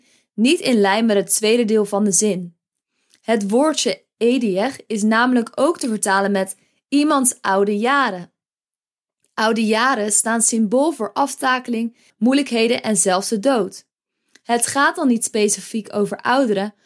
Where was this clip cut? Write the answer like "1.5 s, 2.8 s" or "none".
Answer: 12.1 s